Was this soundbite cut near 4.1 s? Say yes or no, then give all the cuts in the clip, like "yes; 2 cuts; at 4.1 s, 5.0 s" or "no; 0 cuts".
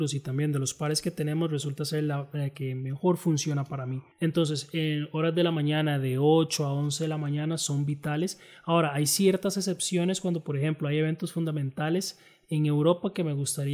yes; 1 cut; at 4.1 s